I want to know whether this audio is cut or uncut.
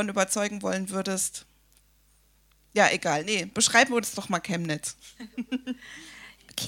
uncut